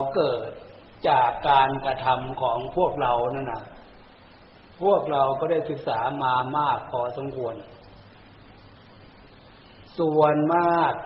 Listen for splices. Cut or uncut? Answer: uncut